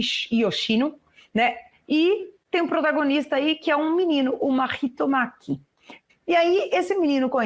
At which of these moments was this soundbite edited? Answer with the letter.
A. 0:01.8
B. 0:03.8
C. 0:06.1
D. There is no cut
C